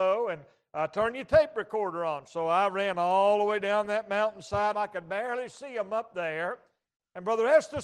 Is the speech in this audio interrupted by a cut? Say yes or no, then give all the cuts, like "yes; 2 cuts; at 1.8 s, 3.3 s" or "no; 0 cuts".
yes; 1 cut; at 4.7 s